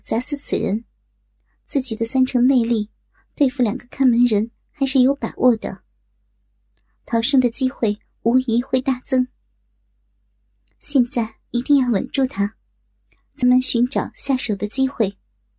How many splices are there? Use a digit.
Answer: 1